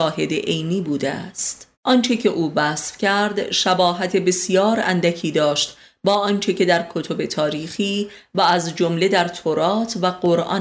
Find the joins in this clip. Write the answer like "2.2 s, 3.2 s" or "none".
1.7 s